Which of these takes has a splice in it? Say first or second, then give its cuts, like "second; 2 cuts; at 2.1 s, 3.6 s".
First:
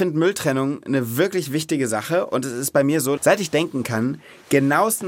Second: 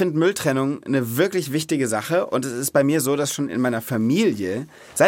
first; 1 cut; at 3.2 s